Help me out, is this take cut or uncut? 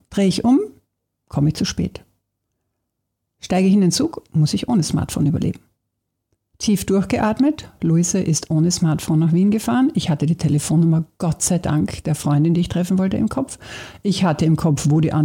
uncut